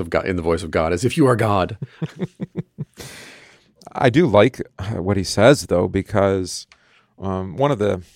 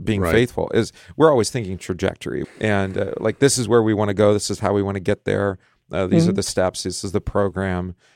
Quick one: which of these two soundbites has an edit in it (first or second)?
second